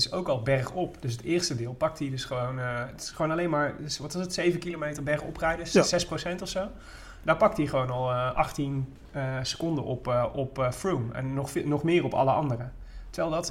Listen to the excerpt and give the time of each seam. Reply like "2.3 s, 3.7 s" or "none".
none